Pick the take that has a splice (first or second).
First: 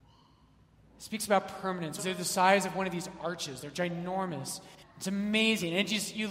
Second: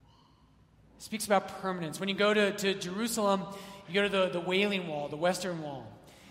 first